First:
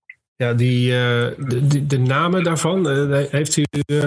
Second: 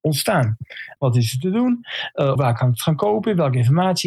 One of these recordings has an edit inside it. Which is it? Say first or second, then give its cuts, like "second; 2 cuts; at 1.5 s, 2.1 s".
second; 2 cuts; at 1.0 s, 2.4 s